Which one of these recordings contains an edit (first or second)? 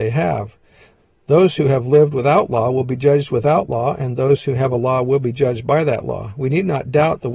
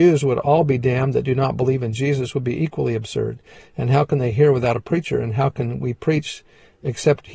second